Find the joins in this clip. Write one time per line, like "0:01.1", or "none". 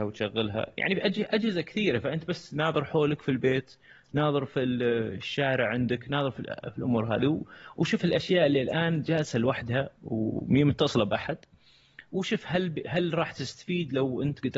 0:10.0

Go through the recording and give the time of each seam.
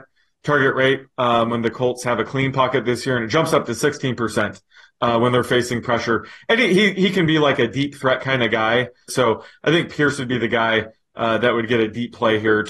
0:09.1

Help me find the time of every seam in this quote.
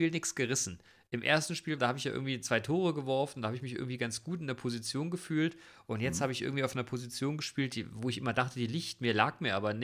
0:01.8

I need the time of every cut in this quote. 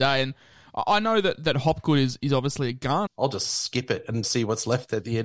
0:03.1
0:04.2

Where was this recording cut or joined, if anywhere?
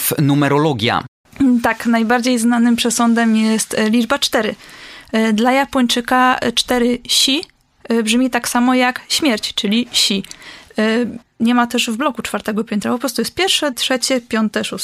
0:11.2
0:13.7

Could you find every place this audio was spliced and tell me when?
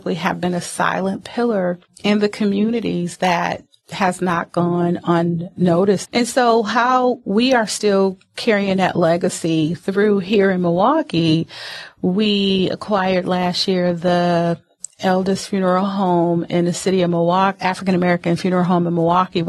0:06.0

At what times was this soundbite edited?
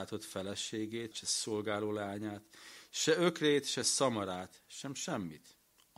0:01.1

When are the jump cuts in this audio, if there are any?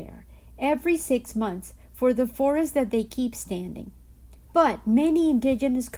0:04.5

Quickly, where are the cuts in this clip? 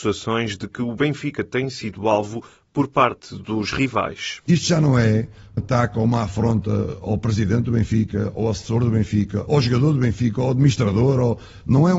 0:05.6
0:09.5

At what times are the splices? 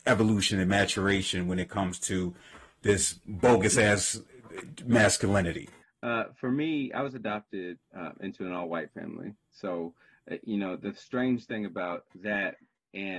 0:05.8

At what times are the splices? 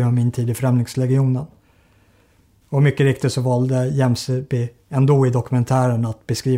0:02.6

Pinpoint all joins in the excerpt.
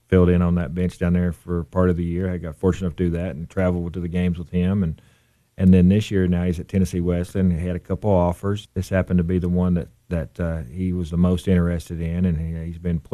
none

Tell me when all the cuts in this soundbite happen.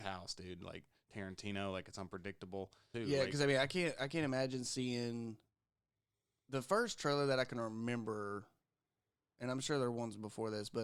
0:02.9

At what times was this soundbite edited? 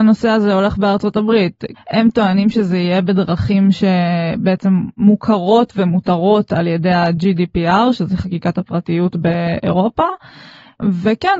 0:01.7

